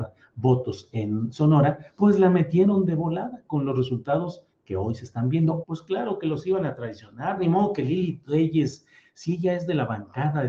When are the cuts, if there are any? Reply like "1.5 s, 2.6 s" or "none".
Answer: 5.6 s